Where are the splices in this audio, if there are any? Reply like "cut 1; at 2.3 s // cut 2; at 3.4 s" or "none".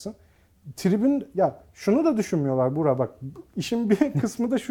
none